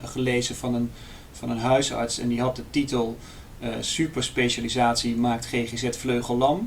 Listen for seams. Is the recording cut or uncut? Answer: uncut